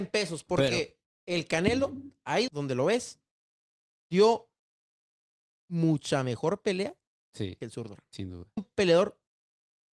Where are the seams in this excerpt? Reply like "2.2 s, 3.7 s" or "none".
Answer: 2.5 s, 8.6 s